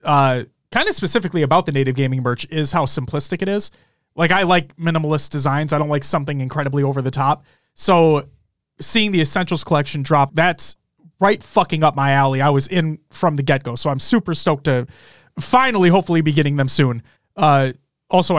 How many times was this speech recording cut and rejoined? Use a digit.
2